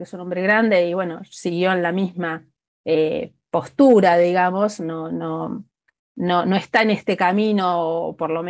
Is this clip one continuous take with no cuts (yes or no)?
yes